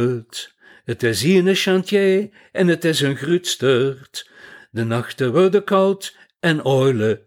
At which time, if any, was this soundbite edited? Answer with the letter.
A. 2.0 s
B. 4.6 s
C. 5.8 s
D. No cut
B